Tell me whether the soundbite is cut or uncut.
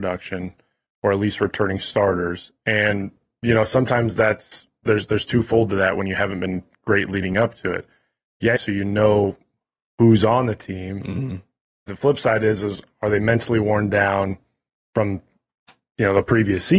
cut